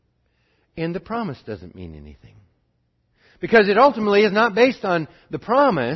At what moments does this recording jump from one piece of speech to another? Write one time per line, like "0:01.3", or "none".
none